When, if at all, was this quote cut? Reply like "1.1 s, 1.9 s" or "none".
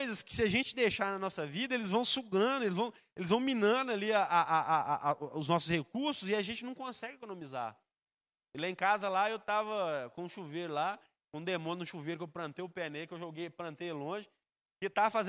none